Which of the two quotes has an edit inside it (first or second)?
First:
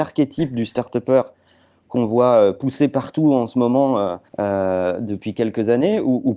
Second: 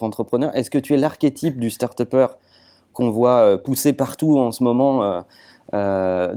first